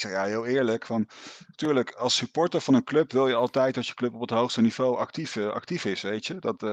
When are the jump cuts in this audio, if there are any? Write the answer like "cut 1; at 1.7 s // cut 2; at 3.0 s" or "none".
none